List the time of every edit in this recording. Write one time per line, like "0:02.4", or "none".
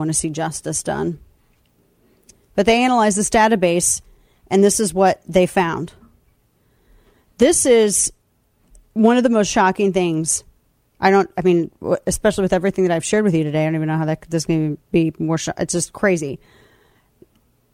none